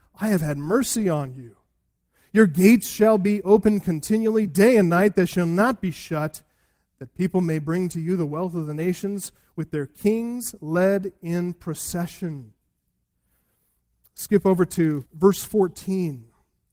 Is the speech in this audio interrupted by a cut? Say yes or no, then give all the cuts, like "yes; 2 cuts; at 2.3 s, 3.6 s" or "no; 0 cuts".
no; 0 cuts